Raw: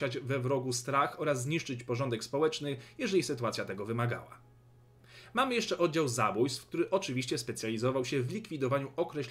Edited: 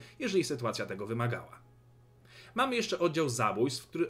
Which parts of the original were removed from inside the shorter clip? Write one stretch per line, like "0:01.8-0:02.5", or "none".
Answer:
none

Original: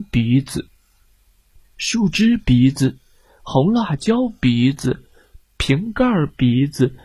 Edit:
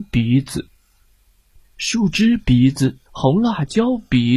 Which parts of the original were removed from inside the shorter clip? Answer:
0:03.1-0:03.4

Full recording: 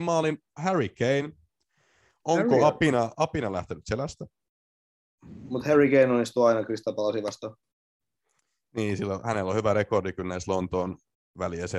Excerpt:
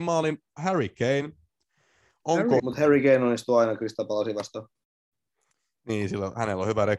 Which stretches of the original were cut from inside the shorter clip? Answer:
0:02.6-0:05.5

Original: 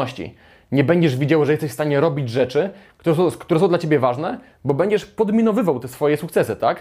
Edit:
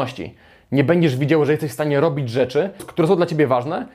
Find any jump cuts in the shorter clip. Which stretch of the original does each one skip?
0:02.8-0:03.3

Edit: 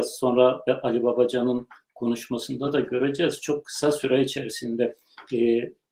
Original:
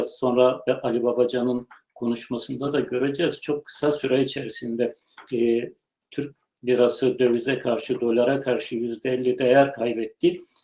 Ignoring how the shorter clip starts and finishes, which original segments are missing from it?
none

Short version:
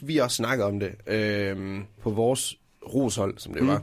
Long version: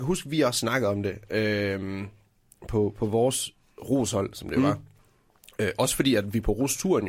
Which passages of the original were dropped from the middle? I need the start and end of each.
0:02.2-0:02.9

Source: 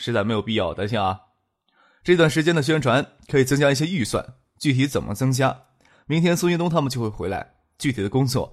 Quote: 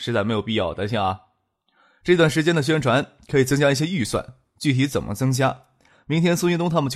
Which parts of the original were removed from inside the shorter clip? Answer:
none

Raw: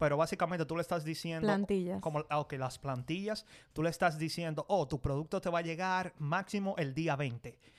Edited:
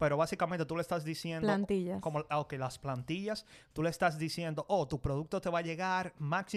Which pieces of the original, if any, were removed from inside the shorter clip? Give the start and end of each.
none

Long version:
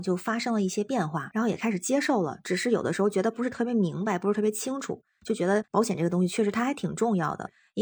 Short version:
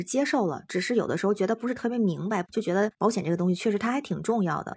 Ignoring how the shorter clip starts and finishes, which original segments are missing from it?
0:04.2-0:05.2

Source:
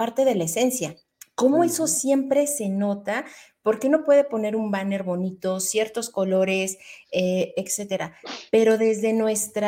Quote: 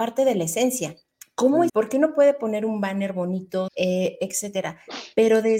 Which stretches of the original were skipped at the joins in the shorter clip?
0:01.7-0:03.6
0:05.6-0:07.0

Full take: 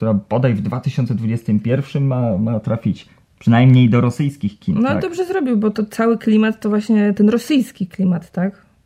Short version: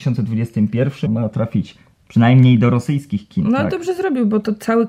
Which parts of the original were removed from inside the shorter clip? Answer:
0:02.0-0:02.4

